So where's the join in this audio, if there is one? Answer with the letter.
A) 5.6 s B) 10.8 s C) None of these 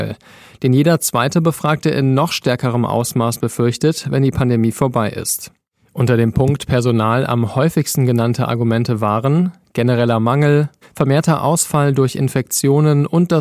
B